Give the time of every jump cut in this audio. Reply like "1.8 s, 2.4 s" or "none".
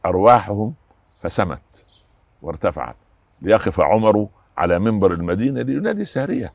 none